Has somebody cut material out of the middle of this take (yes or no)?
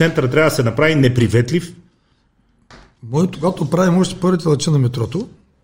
yes